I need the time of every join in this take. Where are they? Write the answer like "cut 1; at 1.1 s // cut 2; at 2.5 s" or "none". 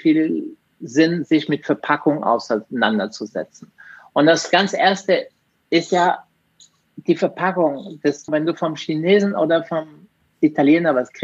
cut 1; at 8.3 s